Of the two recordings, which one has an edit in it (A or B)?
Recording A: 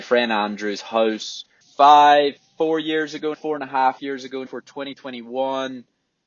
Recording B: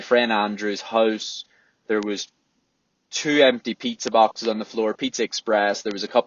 A